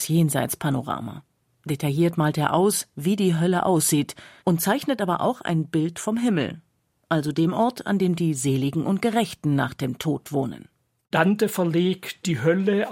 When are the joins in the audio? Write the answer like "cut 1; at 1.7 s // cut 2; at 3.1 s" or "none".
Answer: cut 1; at 4.4 s